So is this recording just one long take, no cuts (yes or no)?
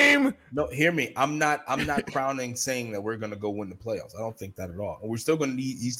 yes